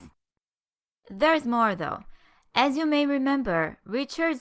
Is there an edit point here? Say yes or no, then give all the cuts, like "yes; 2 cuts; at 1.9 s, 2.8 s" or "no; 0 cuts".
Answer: no; 0 cuts